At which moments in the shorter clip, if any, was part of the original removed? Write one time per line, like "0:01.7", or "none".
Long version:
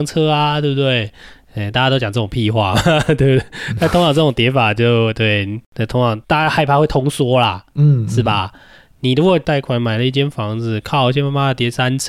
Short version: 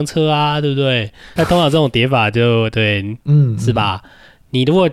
0:01.4
0:03.2